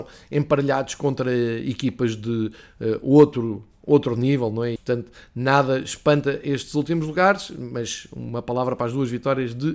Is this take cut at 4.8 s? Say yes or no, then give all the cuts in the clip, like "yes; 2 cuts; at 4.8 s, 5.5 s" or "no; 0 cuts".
yes; 1 cut; at 4.8 s